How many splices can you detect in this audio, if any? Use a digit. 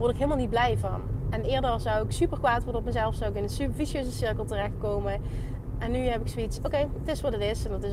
0